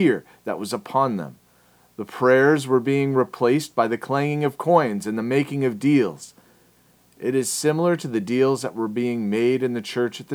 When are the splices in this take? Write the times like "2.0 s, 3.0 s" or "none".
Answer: none